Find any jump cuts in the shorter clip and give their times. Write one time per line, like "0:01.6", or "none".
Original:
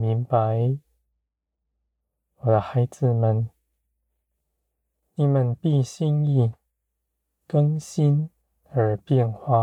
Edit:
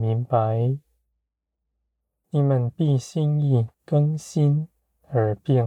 0:02.2
0:03.7